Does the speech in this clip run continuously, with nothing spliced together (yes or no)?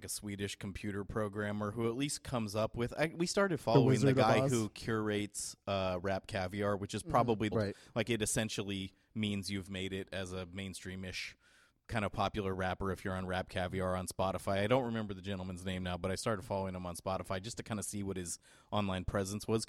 no